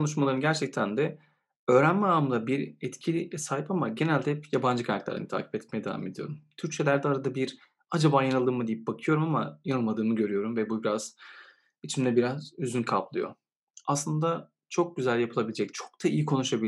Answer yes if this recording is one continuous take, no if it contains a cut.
yes